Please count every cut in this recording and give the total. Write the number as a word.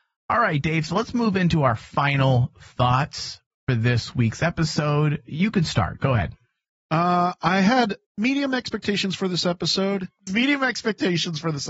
two